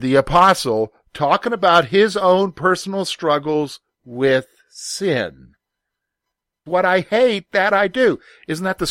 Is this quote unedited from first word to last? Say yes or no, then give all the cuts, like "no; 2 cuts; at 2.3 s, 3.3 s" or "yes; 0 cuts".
no; 1 cut; at 6.7 s